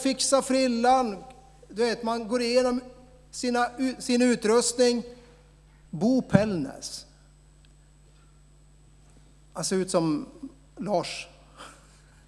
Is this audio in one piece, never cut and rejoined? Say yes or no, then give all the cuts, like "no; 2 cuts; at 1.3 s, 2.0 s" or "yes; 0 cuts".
no; 1 cut; at 5.9 s